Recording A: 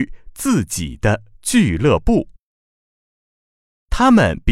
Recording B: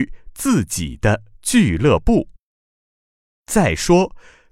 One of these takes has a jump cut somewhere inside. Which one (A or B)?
B